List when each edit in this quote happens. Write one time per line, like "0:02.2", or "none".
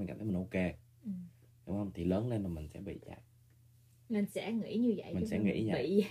none